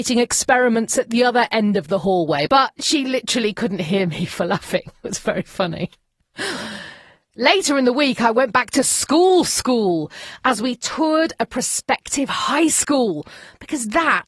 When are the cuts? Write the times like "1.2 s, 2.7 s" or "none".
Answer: 2.5 s